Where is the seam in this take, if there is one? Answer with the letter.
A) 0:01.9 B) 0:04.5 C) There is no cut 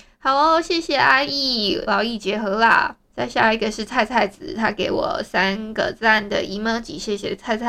A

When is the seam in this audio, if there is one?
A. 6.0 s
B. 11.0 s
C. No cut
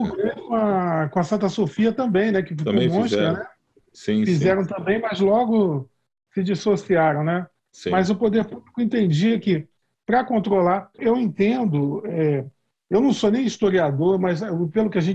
B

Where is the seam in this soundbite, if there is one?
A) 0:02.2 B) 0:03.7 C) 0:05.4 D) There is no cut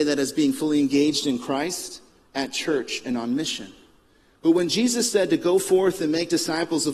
D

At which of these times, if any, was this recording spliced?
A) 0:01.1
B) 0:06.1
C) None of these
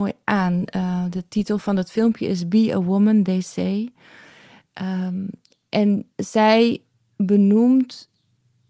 B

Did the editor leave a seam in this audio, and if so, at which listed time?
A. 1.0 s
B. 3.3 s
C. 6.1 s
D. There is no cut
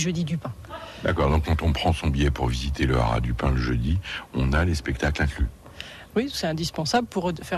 C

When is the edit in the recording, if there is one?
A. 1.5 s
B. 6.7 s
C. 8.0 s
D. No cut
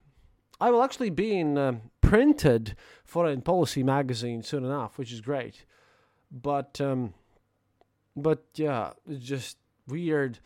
D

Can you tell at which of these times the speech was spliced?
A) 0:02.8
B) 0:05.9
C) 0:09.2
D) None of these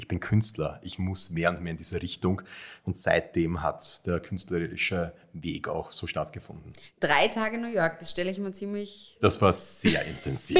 A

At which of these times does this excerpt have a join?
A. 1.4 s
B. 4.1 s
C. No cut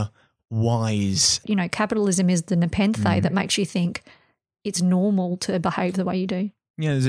A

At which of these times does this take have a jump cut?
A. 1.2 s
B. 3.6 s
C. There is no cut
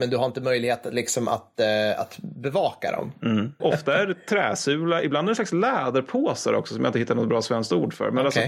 B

